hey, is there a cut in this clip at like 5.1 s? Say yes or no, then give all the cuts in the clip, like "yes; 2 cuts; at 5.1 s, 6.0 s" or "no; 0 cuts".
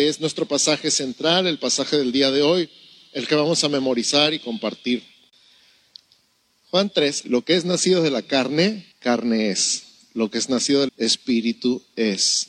no; 3 cuts; at 7.2 s, 8.9 s, 10.9 s